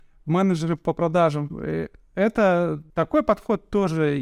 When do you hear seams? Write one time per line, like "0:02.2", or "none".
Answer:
0:02.9